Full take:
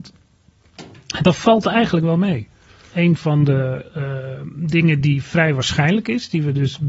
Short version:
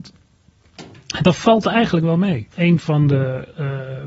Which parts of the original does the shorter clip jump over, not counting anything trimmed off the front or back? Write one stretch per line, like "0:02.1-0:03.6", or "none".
0:02.5-0:02.9

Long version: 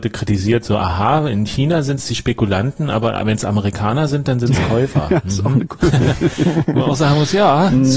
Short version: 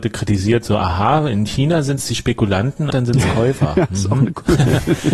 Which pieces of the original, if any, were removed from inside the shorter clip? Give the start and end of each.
0:02.9-0:04.2

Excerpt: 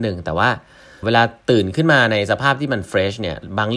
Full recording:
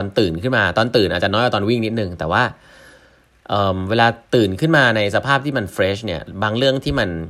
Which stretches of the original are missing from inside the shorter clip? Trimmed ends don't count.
0:03.0-0:03.9

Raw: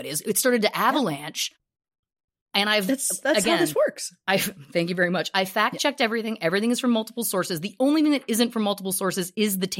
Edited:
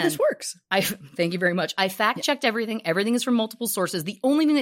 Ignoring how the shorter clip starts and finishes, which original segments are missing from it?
none

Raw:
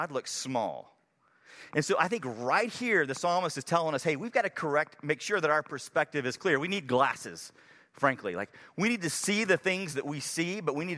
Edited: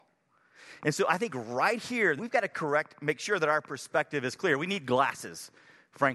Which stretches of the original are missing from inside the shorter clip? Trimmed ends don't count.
0:03.1-0:04.2

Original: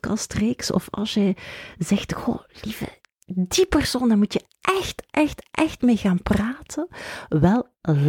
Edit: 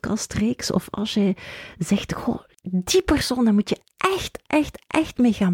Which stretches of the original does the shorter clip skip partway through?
0:02.5-0:03.2

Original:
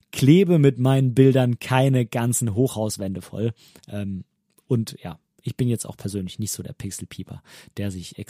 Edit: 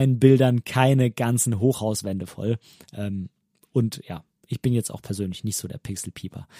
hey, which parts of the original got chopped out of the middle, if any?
none

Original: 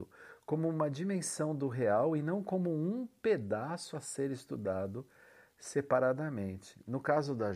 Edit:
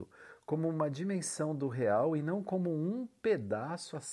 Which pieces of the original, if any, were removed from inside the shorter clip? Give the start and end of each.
none

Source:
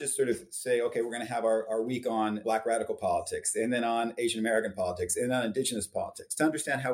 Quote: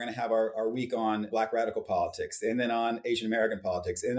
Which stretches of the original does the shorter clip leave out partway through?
none

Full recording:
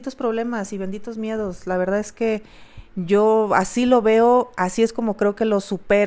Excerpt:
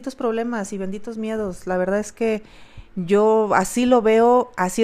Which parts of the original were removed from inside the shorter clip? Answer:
none

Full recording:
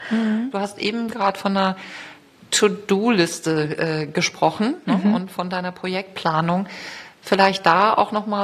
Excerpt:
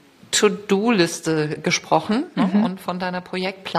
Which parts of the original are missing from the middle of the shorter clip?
0:03.8-0:04.1

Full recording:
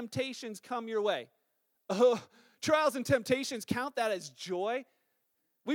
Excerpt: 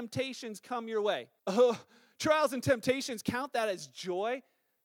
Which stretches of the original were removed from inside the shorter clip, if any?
0:01.4-0:01.8

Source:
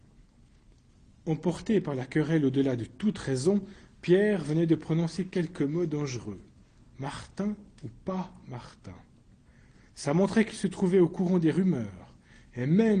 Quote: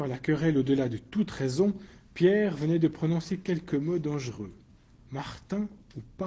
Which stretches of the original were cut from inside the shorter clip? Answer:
none

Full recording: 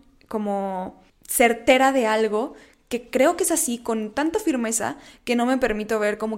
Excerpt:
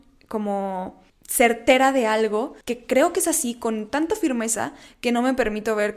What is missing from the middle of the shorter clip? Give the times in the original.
0:02.6-0:02.8

